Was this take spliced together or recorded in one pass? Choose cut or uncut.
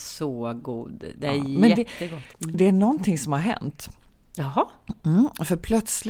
cut